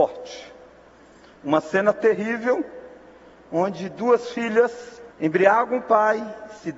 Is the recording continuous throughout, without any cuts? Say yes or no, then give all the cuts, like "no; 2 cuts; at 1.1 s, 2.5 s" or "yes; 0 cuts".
no; 1 cut; at 5.1 s